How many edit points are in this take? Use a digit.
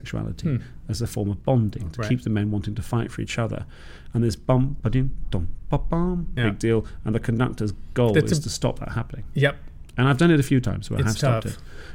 2